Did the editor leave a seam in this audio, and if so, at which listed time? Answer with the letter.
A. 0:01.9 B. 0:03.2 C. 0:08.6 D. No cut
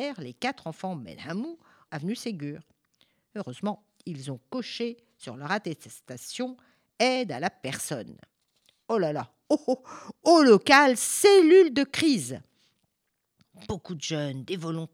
A